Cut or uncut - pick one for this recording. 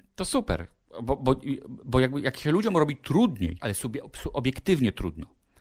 cut